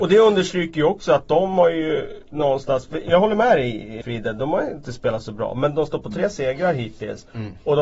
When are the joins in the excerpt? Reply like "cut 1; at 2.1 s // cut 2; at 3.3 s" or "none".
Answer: cut 1; at 4.0 s